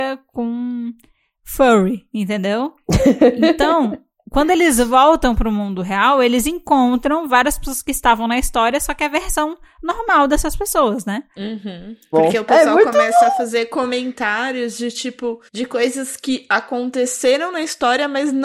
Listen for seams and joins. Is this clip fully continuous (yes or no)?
no